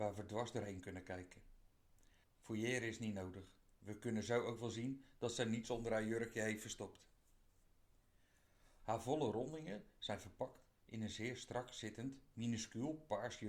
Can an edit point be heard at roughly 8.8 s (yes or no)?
yes